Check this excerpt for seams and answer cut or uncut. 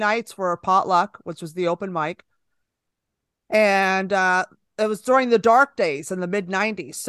uncut